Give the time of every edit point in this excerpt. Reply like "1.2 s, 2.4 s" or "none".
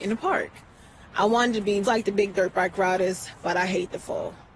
1.8 s